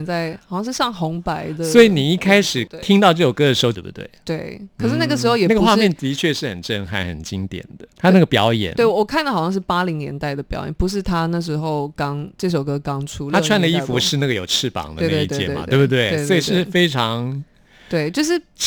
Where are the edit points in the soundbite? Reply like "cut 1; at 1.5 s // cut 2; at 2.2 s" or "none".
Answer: cut 1; at 3.7 s // cut 2; at 7.9 s